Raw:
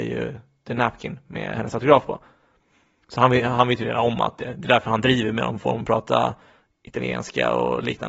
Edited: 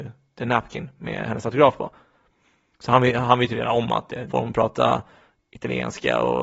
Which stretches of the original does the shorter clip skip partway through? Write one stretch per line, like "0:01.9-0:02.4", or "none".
0:04.6-0:05.6